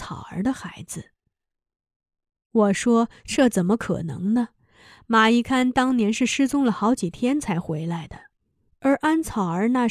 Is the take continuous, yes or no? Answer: yes